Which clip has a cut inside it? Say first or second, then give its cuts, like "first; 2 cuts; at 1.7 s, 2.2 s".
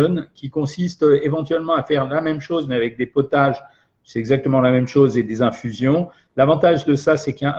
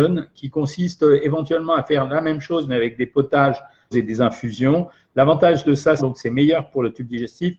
second; 2 cuts; at 3.9 s, 6.0 s